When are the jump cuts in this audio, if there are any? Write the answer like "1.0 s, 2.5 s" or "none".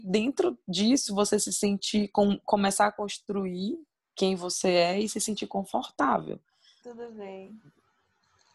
6.8 s